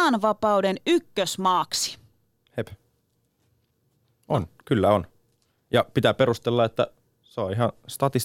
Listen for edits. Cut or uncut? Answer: uncut